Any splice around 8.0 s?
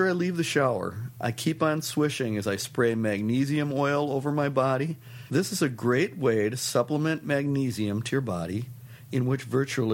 no; 1 cut; at 5.3 s

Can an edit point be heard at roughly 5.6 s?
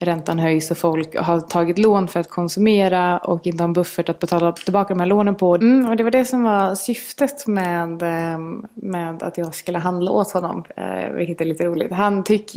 yes; 1 cut; at 5.6 s

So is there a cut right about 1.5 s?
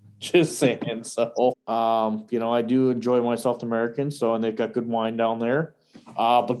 yes; 1 cut; at 1.5 s

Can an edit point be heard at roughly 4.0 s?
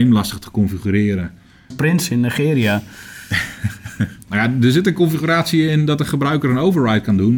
no; 1 cut; at 1.7 s

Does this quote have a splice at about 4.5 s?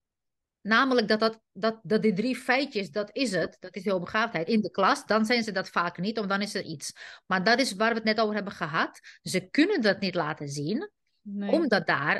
yes; 1 cut; at 4.5 s

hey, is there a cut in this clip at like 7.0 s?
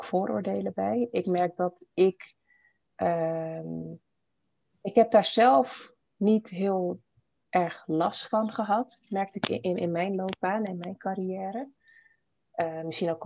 no; 0 cuts

